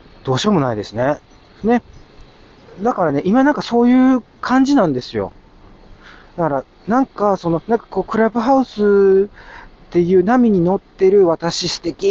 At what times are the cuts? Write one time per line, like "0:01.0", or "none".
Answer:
0:01.6
0:07.6